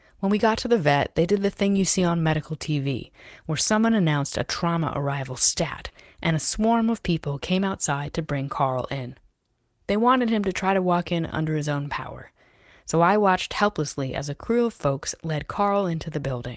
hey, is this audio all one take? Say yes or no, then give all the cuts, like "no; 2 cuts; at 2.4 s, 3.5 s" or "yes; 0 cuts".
yes; 0 cuts